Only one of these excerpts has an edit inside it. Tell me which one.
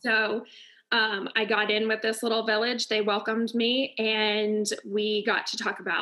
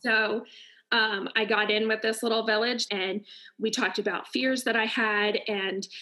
second; 1 cut; at 2.9 s

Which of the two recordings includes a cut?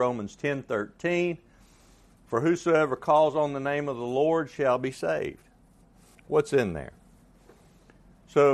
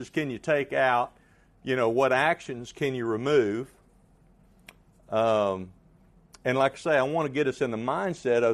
first; 1 cut; at 6.2 s

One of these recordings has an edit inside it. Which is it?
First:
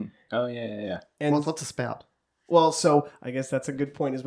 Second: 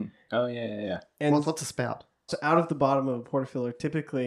second; 1 cut; at 2.3 s

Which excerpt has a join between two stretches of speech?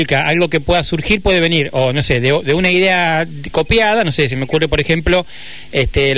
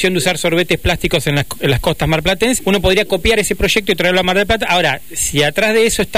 second; 1 cut; at 2.6 s

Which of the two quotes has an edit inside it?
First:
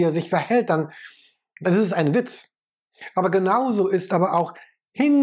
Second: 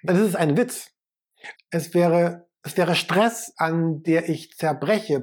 second; 2 cuts; at 1.5 s, 3.5 s

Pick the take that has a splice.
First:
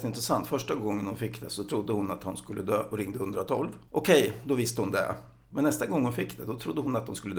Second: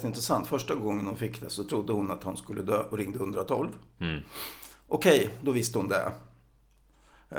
first; 2 cuts; at 3.9 s, 5.5 s

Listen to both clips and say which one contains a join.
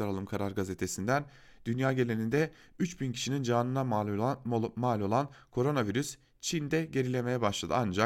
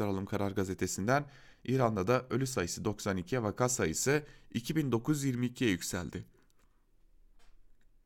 second; 1 cut; at 1.5 s

